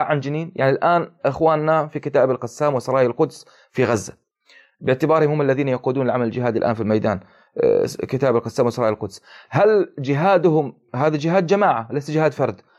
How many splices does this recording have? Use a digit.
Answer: 0